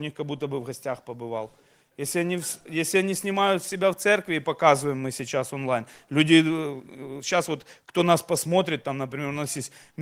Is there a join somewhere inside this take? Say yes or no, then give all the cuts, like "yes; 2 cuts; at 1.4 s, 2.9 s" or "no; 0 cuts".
no; 0 cuts